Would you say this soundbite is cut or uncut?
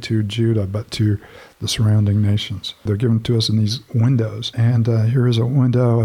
cut